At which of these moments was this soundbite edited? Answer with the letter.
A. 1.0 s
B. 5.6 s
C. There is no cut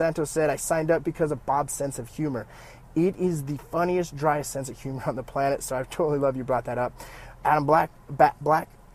A